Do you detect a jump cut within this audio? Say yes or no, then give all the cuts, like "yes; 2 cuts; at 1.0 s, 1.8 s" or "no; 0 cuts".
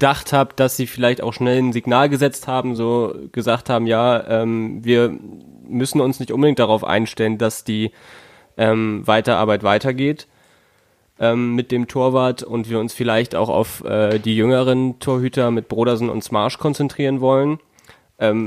no; 0 cuts